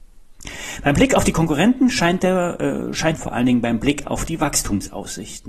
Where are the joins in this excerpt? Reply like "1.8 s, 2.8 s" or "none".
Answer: 3.2 s